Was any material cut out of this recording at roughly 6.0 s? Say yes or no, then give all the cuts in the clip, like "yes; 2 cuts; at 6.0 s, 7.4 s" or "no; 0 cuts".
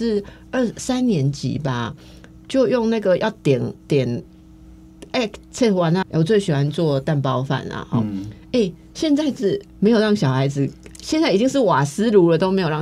yes; 1 cut; at 6.0 s